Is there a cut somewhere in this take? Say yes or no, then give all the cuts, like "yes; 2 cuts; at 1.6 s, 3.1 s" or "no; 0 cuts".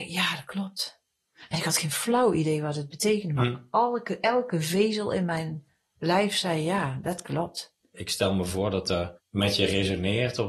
yes; 1 cut; at 7.8 s